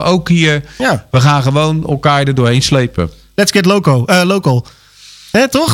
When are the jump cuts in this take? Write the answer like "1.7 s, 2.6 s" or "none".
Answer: none